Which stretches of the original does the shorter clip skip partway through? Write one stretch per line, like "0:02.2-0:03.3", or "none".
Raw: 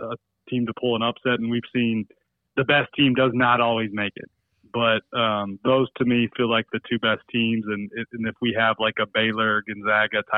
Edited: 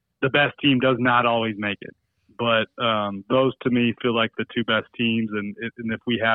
none

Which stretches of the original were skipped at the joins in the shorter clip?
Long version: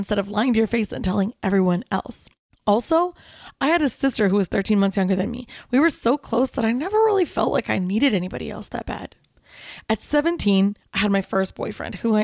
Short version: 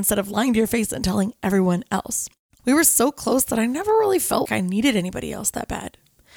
0:02.6-0:05.7
0:07.5-0:07.6

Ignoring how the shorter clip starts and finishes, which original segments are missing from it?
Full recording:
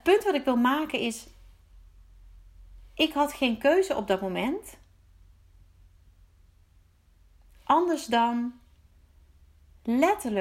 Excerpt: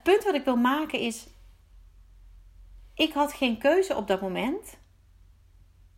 none

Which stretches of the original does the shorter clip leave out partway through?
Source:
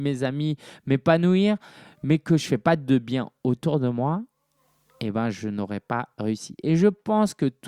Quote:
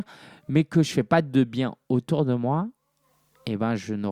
none

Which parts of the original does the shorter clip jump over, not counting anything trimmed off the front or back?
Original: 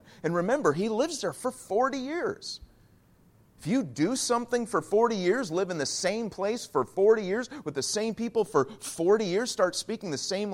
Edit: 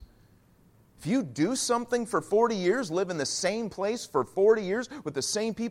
none

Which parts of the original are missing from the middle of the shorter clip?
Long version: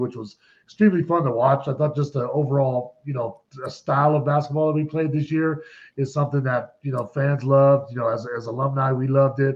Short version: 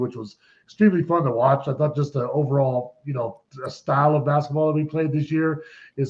none

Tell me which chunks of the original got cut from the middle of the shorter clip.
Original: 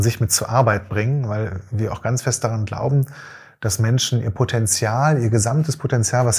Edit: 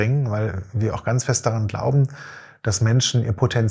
none

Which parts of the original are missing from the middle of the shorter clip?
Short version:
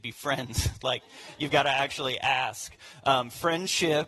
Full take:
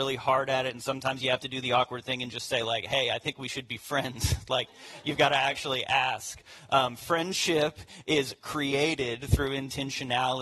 none

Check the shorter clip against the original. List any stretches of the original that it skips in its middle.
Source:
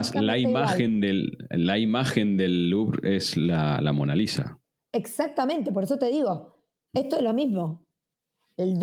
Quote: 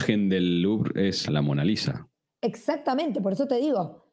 0:03.3-0:03.8

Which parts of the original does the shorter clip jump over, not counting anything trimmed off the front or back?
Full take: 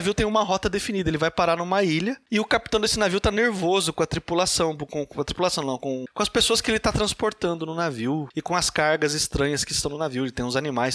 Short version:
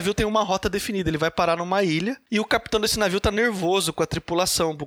none

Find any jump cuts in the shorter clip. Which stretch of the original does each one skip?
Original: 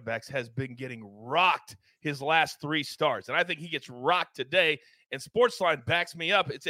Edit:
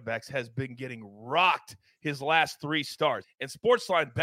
0:03.2-0:04.9

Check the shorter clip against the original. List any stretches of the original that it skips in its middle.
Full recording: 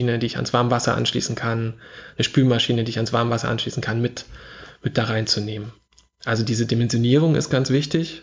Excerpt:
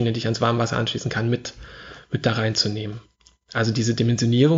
none

